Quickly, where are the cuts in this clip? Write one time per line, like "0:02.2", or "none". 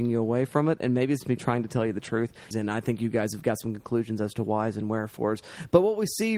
0:01.2
0:02.5